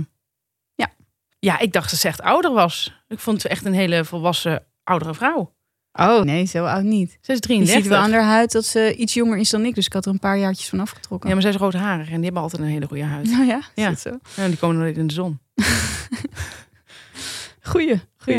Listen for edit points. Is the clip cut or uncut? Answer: cut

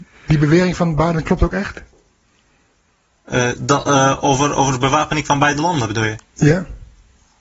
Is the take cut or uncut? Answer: uncut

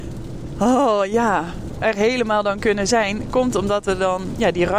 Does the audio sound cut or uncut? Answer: uncut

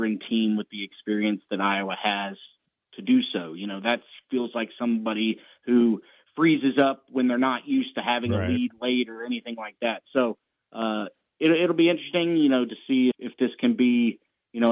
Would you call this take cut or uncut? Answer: cut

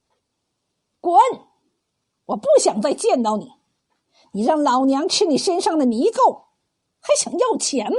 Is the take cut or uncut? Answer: uncut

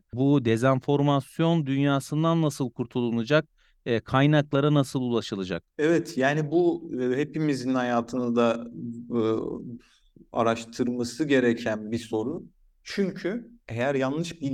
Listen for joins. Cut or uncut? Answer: uncut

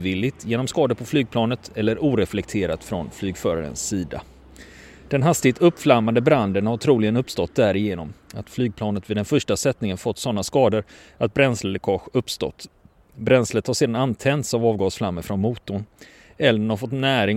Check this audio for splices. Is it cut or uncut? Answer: uncut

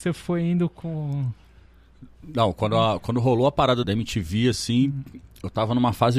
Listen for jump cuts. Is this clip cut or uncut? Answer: cut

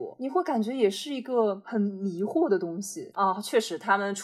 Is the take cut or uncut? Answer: cut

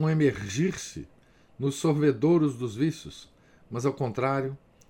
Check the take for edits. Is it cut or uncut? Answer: uncut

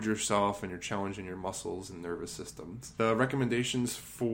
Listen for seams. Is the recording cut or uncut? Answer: uncut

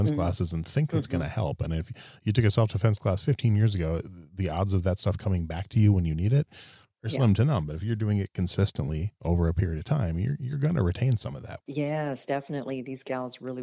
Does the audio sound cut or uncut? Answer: uncut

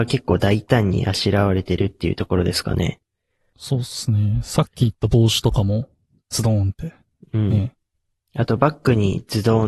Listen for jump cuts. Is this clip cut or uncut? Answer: uncut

